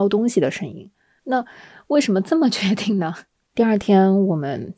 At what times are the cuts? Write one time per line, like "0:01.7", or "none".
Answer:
0:01.2
0:03.4